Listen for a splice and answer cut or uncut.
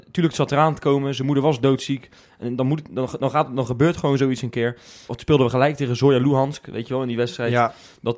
cut